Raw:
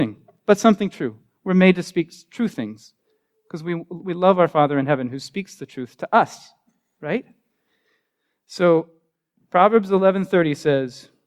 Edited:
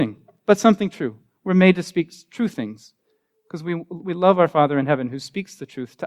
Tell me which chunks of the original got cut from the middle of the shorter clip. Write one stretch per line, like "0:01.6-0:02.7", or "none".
none